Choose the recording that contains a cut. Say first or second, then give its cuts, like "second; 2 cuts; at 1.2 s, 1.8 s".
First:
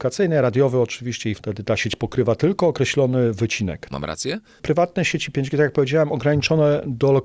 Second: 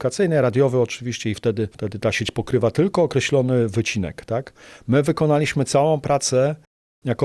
first; 2 cuts; at 1.3 s, 3.9 s